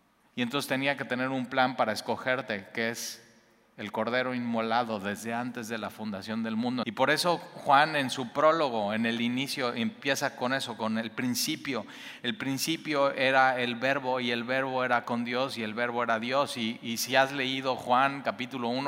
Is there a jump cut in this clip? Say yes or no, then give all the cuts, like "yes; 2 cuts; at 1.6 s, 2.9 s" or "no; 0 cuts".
yes; 1 cut; at 6.8 s